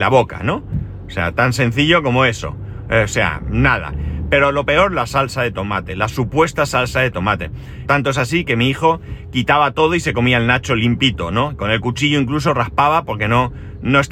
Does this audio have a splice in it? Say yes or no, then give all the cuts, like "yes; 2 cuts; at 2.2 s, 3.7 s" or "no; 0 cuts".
yes; 1 cut; at 7.9 s